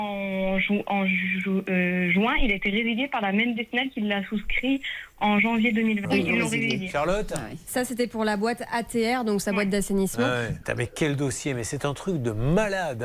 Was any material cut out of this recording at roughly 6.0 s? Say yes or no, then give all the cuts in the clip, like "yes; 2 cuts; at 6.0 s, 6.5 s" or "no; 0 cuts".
yes; 2 cuts; at 6.0 s, 10.6 s